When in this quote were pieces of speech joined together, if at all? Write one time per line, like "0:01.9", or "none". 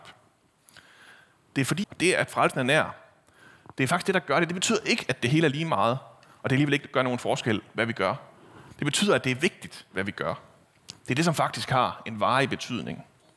0:01.8
0:08.7
0:10.9